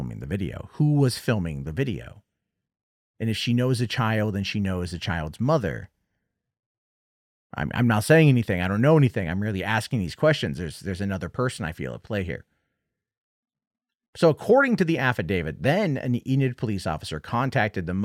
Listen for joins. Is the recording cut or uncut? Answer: uncut